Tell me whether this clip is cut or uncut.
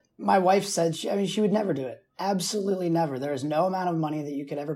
uncut